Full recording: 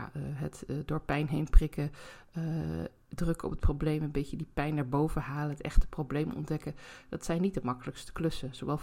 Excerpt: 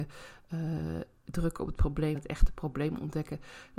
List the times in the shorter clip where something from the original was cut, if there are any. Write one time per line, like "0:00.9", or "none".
0:02.1